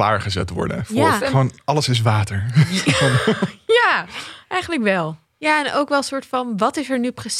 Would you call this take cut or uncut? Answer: cut